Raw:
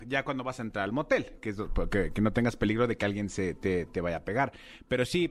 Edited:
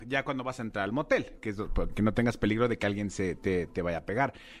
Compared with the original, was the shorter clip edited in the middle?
yes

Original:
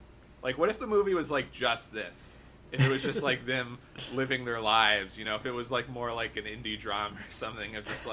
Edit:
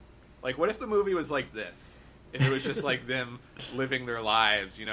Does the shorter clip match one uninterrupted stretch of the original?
no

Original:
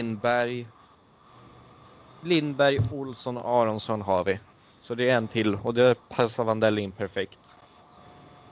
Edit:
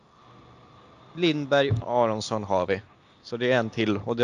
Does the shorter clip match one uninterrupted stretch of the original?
no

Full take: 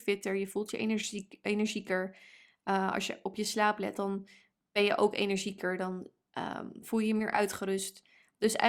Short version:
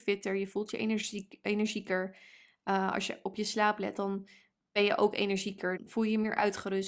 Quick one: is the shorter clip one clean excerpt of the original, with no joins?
no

